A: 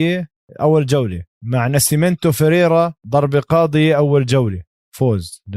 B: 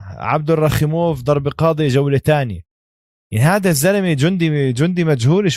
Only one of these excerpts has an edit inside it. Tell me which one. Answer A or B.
A